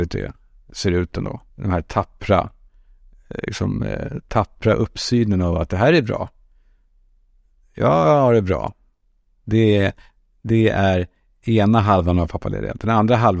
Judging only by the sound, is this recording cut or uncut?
cut